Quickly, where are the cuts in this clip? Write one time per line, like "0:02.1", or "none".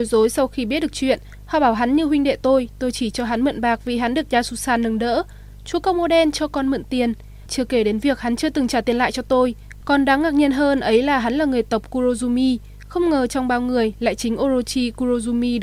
none